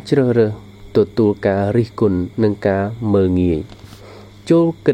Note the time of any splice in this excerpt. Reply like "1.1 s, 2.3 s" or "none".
2.3 s

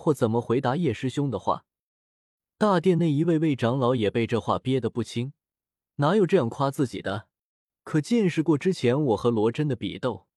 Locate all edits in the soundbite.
none

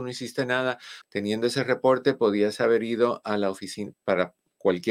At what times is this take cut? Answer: 1.0 s, 3.9 s

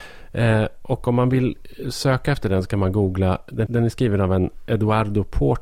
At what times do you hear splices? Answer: 3.7 s

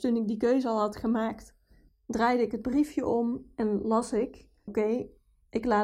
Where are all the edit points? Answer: 4.7 s

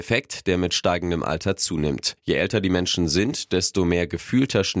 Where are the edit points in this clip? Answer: 2.2 s

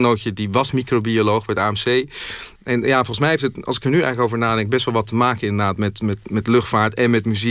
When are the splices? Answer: 2.6 s

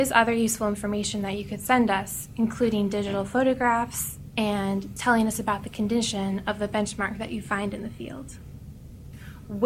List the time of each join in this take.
5.0 s

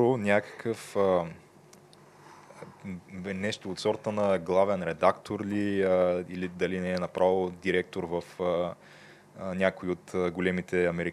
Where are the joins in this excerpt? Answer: none

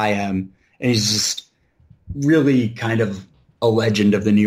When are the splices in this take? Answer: 2.0 s

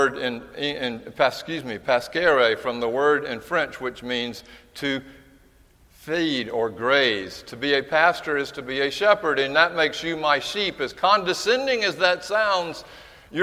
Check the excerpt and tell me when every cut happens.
none

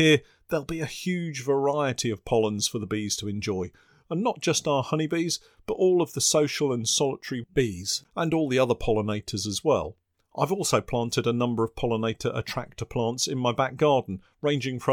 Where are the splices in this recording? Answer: none

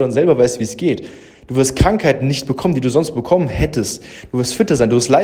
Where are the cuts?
none

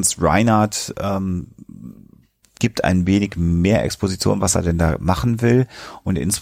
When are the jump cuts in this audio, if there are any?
2.6 s

